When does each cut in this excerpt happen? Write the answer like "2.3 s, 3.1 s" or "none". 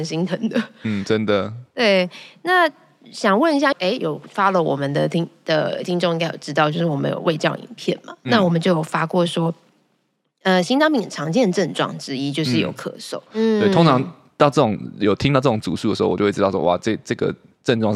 3.7 s, 13.3 s